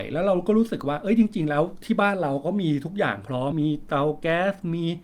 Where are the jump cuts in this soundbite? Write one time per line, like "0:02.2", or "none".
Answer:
0:03.5